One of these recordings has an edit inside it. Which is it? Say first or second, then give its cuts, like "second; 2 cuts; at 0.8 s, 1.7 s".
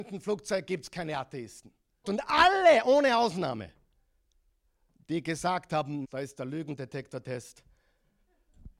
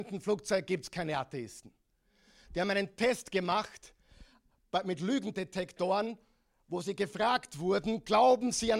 first; 2 cuts; at 2.0 s, 6.0 s